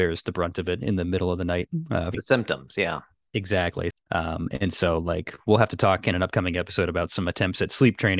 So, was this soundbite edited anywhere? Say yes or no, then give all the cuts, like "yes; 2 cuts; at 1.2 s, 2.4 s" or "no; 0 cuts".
yes; 2 cuts; at 2.1 s, 3.9 s